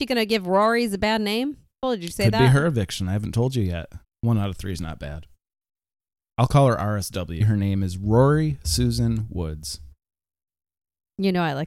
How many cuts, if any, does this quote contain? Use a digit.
3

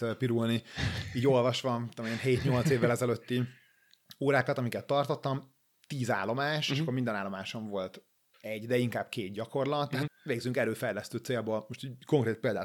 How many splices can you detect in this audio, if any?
2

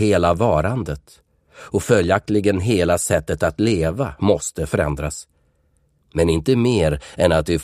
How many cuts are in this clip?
1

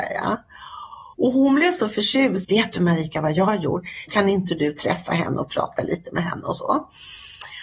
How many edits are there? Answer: 3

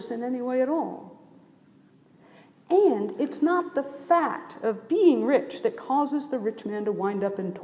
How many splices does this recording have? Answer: 0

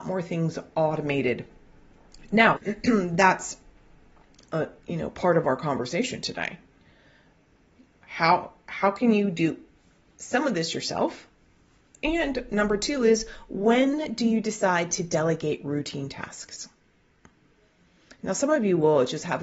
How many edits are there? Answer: 1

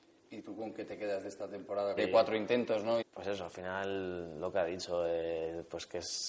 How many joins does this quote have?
2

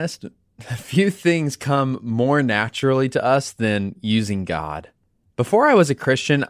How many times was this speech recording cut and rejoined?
0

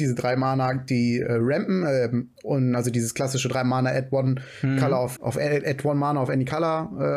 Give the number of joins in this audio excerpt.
1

